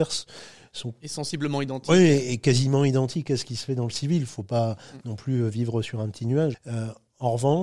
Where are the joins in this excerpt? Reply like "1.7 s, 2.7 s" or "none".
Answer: 6.5 s